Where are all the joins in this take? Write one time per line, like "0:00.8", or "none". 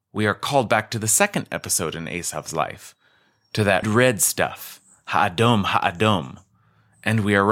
0:03.8